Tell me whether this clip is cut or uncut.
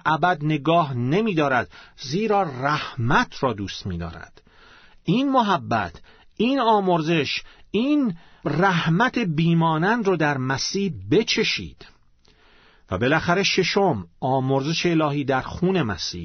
uncut